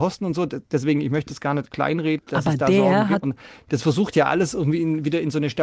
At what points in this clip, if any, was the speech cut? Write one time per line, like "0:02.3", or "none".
0:02.2
0:03.2

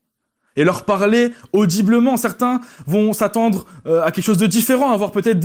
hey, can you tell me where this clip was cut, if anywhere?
none

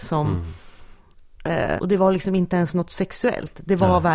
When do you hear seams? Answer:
0:01.8

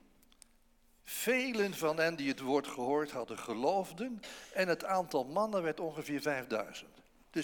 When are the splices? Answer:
none

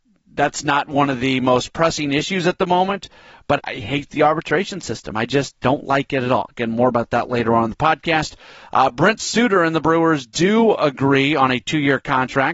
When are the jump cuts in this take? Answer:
0:03.6

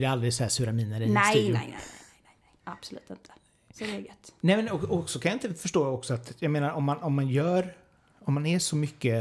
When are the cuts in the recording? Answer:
0:02.6

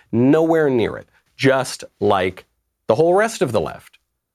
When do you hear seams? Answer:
0:01.3

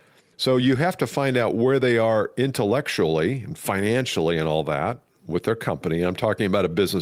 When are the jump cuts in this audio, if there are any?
none

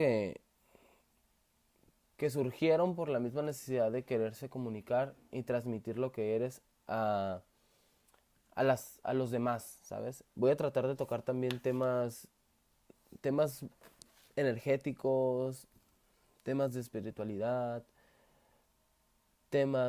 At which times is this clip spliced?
0:10.3

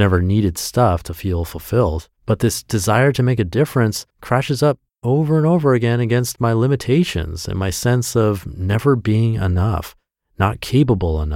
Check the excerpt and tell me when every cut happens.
0:02.2
0:04.1

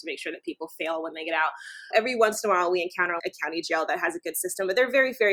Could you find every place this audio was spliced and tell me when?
0:01.9
0:03.2

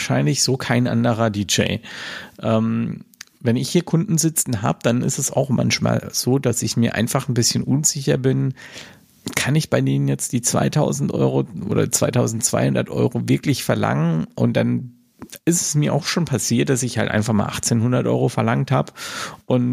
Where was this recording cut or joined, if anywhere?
none

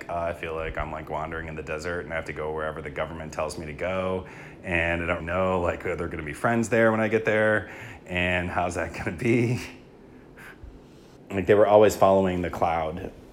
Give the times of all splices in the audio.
0:05.2
0:11.2

